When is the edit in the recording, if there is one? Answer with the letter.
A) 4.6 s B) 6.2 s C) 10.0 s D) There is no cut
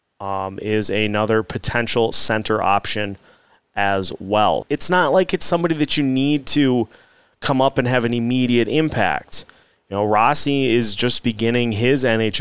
A